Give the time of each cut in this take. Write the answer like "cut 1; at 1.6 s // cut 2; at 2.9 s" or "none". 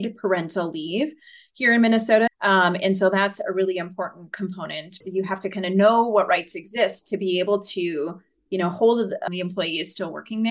cut 1; at 2.3 s // cut 2; at 5.0 s // cut 3; at 9.3 s